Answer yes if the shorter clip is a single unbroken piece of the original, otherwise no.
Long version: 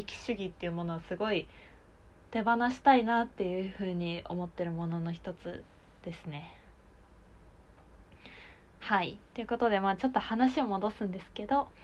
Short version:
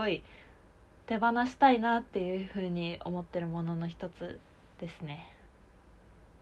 yes